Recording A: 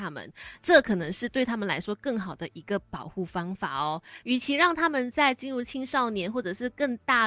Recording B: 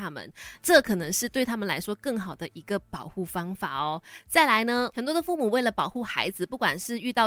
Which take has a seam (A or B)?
A